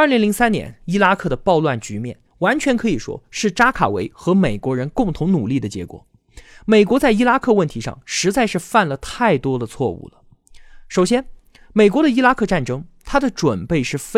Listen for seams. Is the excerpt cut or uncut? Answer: uncut